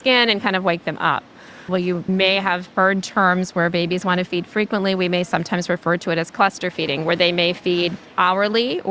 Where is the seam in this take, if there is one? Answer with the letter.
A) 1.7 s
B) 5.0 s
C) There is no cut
A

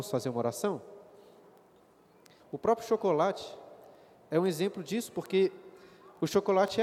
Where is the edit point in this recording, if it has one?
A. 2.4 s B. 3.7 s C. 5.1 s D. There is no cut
A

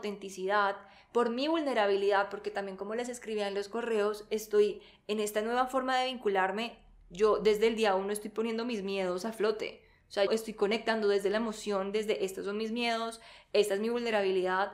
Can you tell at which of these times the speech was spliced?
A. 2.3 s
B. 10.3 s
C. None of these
B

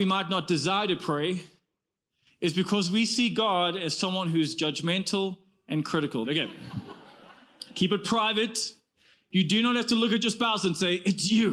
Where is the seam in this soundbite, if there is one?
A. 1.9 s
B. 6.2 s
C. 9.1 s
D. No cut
B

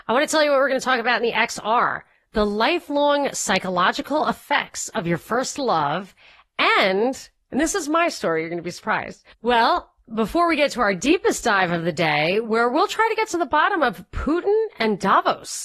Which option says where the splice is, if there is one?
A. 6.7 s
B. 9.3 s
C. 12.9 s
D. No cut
B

